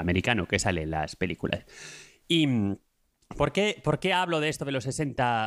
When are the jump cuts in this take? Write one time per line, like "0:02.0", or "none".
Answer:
none